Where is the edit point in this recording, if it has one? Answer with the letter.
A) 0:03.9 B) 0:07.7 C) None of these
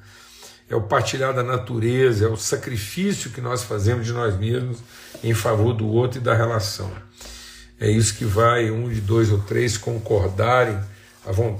C